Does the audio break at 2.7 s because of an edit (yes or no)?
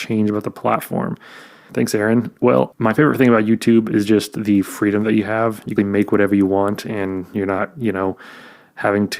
yes